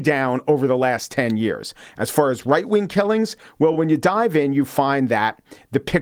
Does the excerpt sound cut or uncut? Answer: uncut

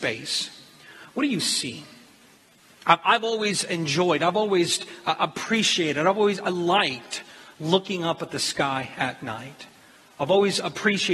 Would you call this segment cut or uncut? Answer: uncut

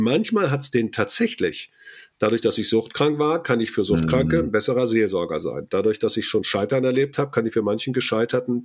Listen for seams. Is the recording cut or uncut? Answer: uncut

